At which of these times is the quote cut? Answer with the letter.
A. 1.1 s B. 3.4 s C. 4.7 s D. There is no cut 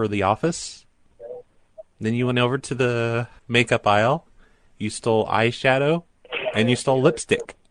B